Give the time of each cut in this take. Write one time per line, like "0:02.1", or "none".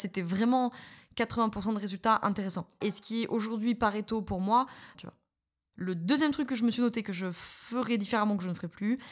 0:02.8
0:04.9